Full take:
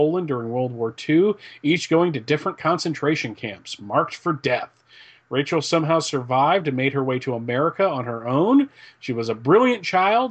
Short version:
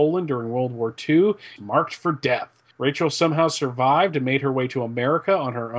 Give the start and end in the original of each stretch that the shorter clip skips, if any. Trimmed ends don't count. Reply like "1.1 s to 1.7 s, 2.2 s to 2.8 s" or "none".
1.6 s to 3.8 s, 4.9 s to 5.2 s